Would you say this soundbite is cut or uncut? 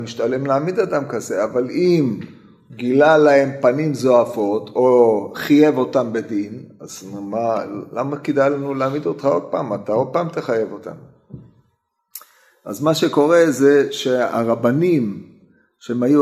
uncut